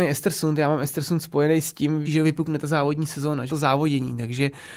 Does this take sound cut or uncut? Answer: cut